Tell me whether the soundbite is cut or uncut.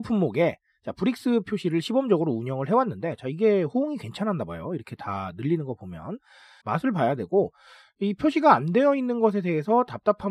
cut